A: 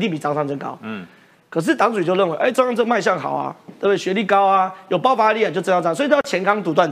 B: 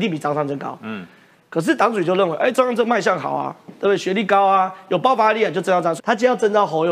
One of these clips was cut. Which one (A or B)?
B